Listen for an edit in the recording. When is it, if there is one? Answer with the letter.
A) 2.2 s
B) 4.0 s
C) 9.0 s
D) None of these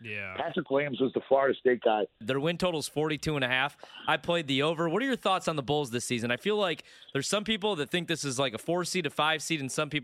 A